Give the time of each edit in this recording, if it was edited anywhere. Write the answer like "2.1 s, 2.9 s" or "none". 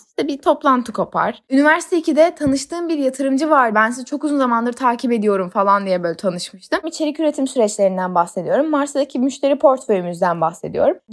3.7 s, 6.8 s